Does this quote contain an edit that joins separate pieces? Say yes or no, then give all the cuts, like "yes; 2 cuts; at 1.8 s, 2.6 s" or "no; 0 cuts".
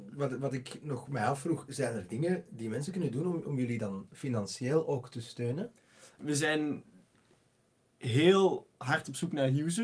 yes; 1 cut; at 6.2 s